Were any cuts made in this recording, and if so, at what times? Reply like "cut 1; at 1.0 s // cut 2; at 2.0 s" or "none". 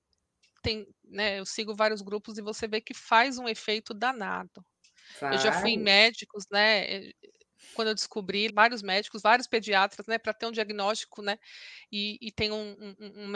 cut 1; at 8.5 s